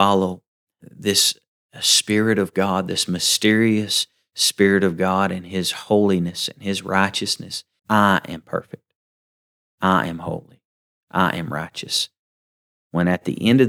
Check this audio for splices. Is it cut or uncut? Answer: cut